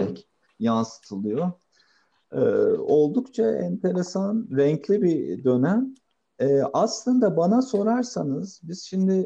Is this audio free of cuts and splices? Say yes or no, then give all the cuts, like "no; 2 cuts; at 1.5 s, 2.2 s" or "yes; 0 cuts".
yes; 0 cuts